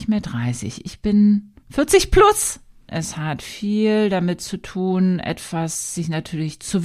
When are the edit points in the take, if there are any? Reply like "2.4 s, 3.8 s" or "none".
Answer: 2.9 s